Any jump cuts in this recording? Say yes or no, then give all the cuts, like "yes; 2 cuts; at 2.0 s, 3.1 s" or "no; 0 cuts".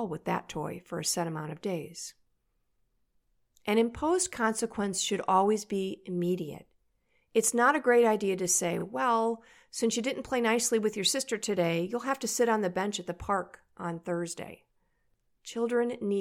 no; 0 cuts